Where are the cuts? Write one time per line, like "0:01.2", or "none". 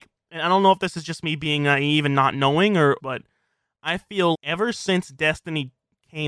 0:03.0
0:04.3